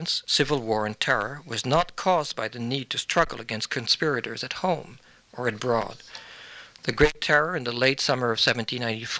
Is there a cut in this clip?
no; 0 cuts

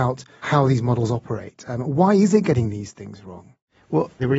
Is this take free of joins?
yes; 0 cuts

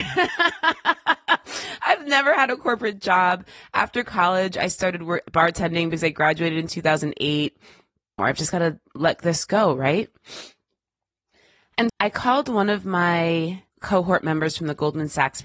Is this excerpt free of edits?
no; 3 cuts; at 8.2 s, 11.9 s, 13.7 s

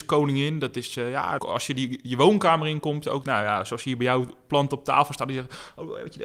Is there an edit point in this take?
yes; 2 cuts; at 1.4 s, 3.2 s

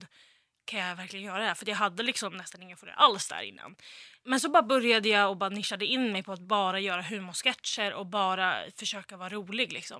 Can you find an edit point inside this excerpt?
no; 0 cuts

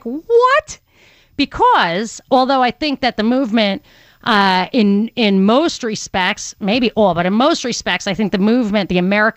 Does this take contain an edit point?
no; 0 cuts

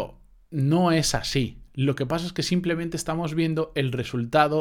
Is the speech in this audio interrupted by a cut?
no; 0 cuts

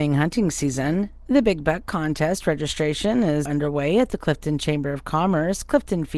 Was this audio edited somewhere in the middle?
yes; 1 cut; at 3.4 s

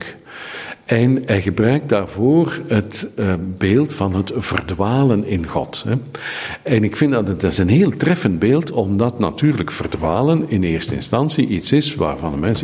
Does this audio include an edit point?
no; 0 cuts

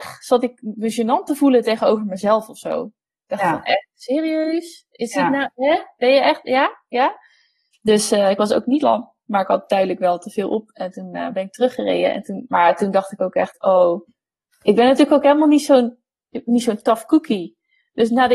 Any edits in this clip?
yes; 1 cut; at 7.7 s

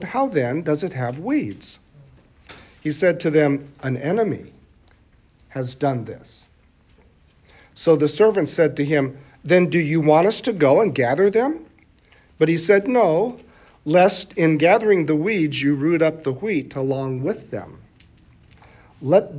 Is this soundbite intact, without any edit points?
yes; 0 cuts

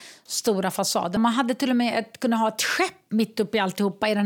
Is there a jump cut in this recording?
yes; 1 cut; at 1.2 s

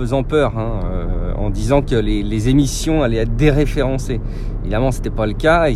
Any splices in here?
no; 0 cuts

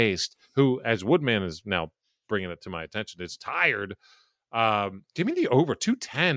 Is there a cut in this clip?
no; 0 cuts

